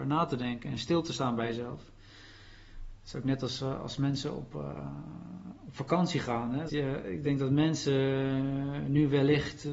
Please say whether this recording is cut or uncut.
cut